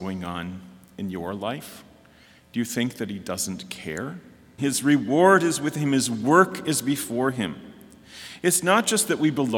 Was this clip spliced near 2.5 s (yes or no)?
no